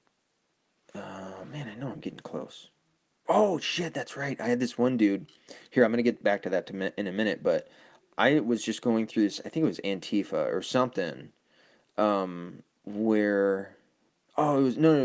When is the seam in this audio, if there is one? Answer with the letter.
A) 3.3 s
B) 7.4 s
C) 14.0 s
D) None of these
A